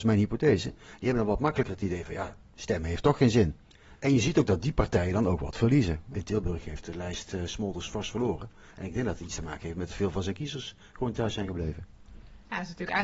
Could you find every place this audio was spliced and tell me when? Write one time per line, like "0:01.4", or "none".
none